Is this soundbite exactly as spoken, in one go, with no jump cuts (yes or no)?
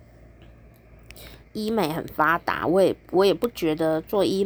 no